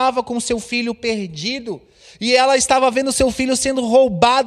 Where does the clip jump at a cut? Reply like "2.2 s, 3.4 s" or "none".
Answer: none